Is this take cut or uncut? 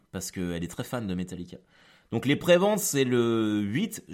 uncut